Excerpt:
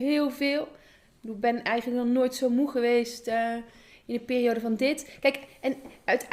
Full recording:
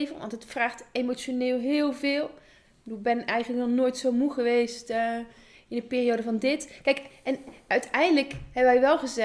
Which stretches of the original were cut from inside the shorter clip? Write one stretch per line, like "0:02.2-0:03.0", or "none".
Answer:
none